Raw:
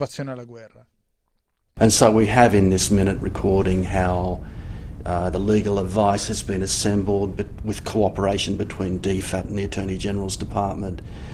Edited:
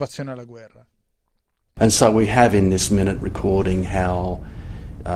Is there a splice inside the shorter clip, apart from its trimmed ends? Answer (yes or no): no